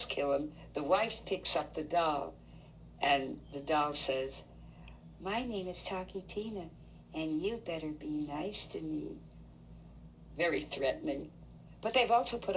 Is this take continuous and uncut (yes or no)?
yes